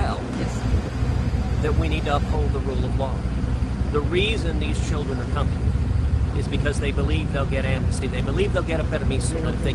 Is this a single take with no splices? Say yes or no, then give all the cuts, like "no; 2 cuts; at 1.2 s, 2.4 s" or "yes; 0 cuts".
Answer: yes; 0 cuts